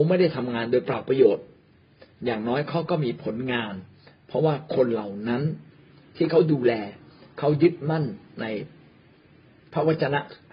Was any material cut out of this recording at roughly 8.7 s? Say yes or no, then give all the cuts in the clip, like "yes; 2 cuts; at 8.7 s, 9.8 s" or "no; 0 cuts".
no; 0 cuts